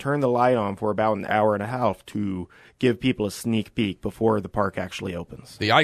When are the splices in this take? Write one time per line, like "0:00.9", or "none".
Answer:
0:01.3